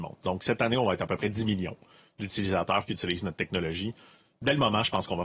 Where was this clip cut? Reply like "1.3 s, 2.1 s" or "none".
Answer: none